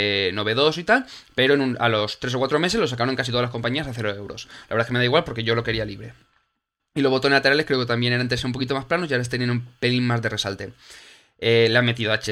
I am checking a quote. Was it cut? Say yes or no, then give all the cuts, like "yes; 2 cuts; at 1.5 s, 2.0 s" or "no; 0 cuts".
yes; 1 cut; at 6.8 s